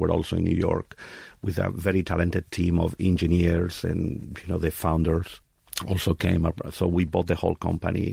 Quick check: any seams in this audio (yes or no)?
no